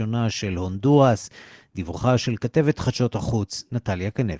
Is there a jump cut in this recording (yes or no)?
no